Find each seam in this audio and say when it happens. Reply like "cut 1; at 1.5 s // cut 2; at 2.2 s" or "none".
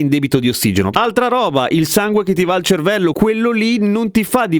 cut 1; at 0.9 s // cut 2; at 3.1 s